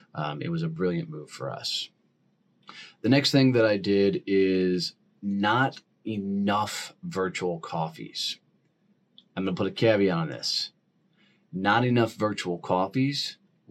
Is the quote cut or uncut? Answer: uncut